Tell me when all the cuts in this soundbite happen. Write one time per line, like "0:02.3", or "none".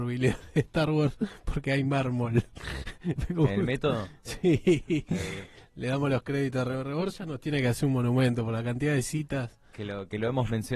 none